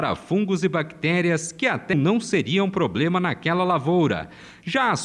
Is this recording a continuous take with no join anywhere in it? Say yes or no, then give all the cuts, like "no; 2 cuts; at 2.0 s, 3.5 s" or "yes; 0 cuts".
no; 1 cut; at 1.9 s